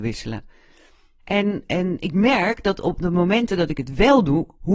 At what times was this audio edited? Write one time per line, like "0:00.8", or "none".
0:01.2